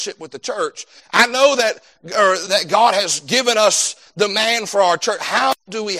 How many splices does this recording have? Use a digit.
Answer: 2